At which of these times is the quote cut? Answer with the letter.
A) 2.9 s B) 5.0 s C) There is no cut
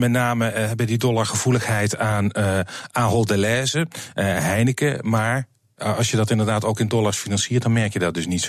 C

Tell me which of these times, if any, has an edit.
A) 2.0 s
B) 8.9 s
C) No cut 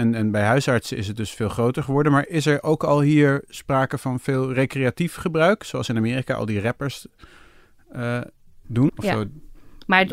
B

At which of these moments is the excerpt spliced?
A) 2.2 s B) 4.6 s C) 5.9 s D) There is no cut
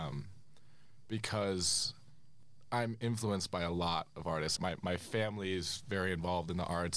B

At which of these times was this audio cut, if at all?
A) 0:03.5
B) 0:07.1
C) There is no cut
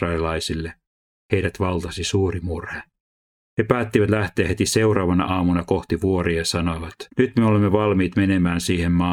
B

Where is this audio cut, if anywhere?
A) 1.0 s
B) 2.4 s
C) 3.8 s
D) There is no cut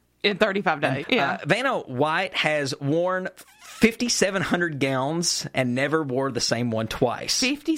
A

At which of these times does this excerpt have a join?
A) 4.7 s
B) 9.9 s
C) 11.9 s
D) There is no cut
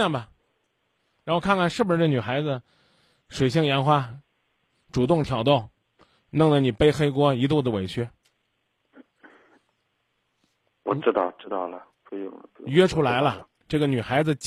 C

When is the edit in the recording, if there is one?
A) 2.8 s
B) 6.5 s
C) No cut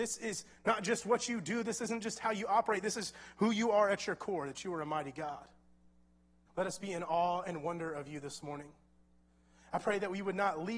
B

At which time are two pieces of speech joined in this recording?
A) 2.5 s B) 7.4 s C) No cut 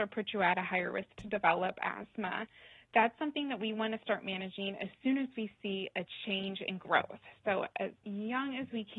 C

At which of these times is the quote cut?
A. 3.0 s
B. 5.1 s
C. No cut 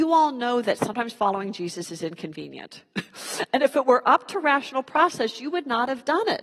C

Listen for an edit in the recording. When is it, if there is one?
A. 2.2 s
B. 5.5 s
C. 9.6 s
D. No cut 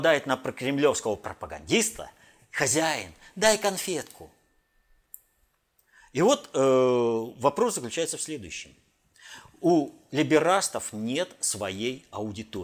D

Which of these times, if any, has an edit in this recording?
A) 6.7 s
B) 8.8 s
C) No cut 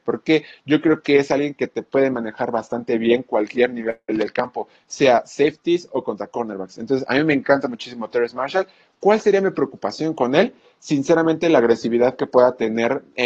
C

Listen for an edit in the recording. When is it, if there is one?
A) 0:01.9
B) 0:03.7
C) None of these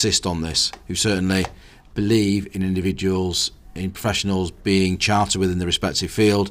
A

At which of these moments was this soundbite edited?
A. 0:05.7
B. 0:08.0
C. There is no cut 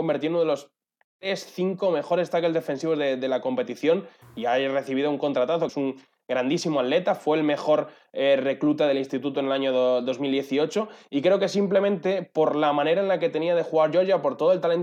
A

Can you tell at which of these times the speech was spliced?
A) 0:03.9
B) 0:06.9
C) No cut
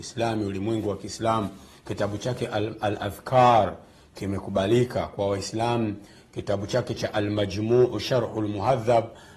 C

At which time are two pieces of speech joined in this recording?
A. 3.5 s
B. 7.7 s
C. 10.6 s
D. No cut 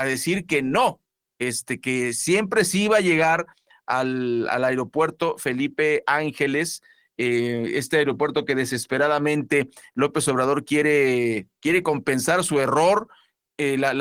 D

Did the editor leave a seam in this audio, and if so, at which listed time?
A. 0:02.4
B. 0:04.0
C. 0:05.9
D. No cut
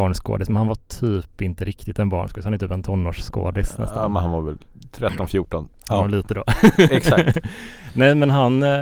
C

